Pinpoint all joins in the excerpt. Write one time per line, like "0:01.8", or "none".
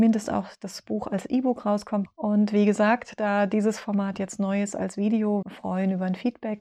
0:02.1
0:05.4